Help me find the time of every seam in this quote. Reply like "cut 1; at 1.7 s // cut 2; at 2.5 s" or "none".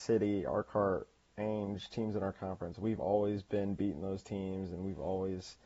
none